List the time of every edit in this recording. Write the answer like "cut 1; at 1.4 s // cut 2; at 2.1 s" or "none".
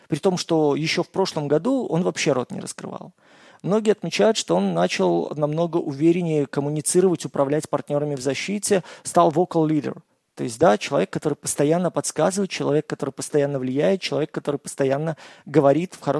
none